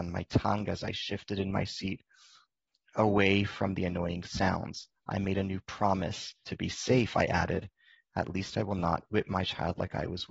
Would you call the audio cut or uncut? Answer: cut